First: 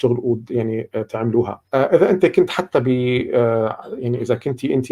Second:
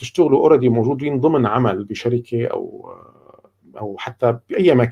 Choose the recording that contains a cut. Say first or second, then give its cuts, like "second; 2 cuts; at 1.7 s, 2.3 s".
first; 1 cut; at 1.7 s